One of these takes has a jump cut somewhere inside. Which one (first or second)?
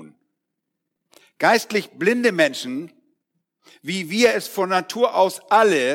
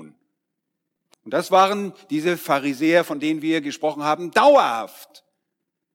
second